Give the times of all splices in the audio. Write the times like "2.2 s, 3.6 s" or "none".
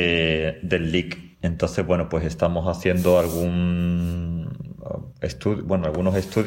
1.3 s

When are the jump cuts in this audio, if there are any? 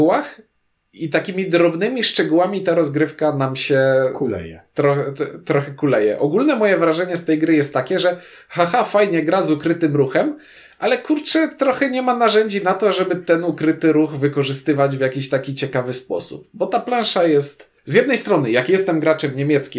17.8 s

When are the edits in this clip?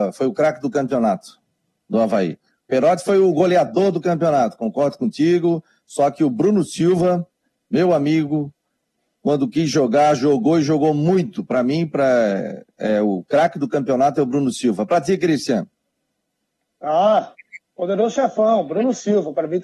none

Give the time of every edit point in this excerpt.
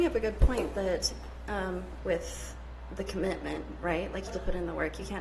2.0 s, 4.3 s

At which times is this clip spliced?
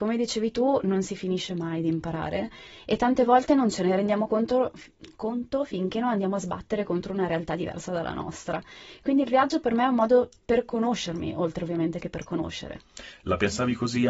none

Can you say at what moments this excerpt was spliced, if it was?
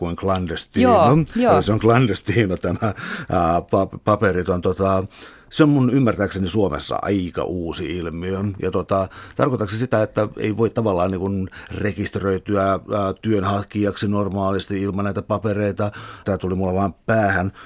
16.2 s

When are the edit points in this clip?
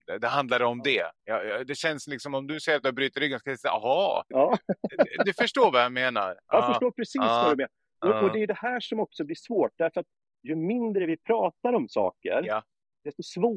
4.3 s

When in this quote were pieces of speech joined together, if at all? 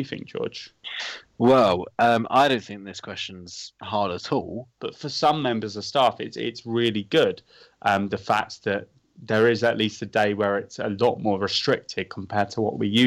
4.8 s

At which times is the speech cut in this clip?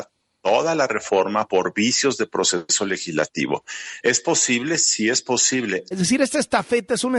5.9 s

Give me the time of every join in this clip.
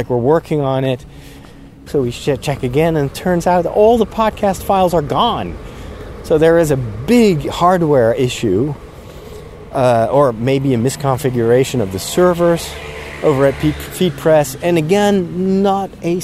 1.9 s

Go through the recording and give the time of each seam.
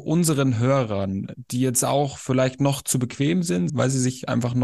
3.7 s

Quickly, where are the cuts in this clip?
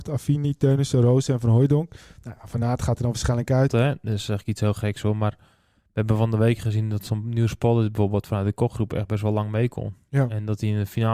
3.7 s

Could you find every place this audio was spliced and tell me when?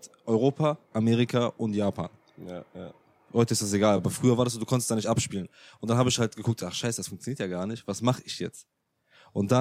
none

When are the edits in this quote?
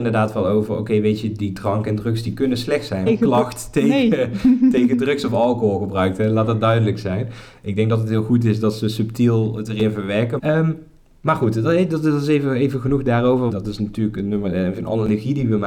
3.1 s, 10.4 s, 13.5 s

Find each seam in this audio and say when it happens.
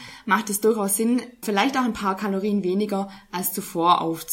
1.4 s

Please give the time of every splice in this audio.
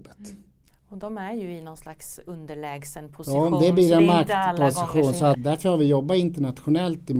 5.3 s

